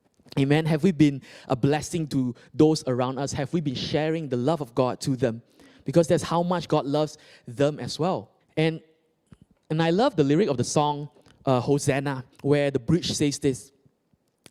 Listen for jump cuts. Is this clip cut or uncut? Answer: cut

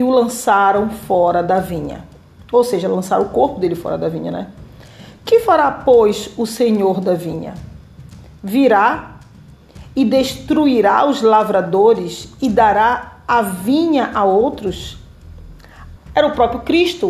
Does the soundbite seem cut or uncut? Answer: cut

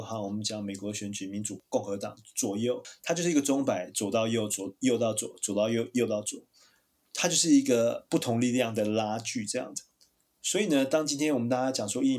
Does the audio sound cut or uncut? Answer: uncut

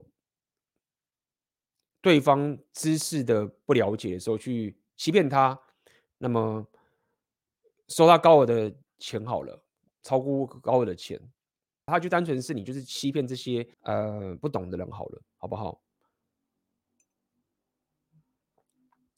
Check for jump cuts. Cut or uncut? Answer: cut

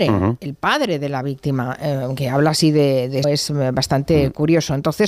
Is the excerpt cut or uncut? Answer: cut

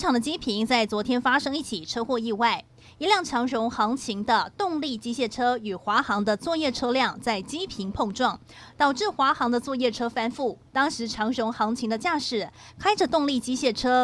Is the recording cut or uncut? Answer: cut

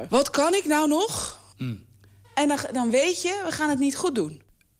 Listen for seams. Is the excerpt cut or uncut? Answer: cut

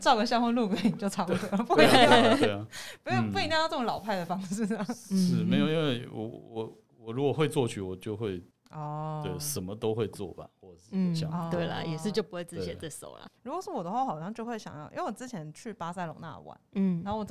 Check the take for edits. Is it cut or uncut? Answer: cut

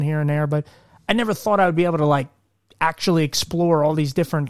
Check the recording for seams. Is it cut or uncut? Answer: uncut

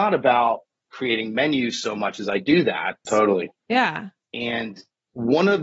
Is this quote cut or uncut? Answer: cut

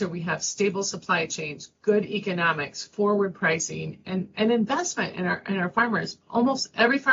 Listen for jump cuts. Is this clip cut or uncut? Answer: uncut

